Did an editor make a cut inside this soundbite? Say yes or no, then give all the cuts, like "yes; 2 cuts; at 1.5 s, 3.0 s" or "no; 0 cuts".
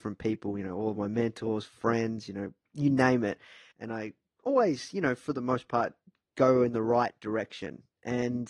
yes; 1 cut; at 3.7 s